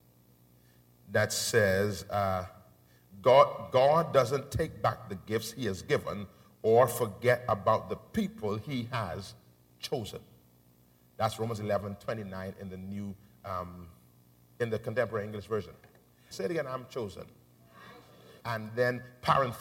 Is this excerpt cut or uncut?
cut